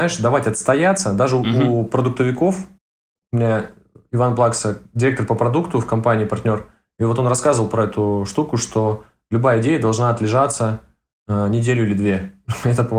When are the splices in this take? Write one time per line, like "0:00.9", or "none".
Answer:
none